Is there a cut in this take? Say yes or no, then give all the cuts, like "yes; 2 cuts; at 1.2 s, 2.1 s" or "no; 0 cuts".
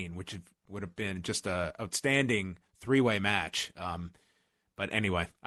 no; 0 cuts